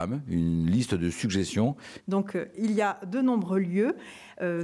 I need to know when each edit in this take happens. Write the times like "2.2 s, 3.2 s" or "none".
2.0 s